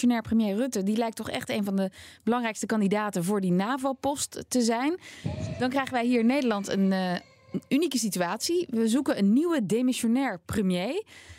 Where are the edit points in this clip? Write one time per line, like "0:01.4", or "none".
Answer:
none